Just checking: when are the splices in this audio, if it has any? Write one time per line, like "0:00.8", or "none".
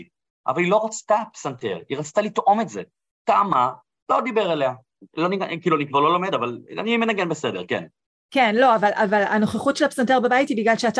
0:05.0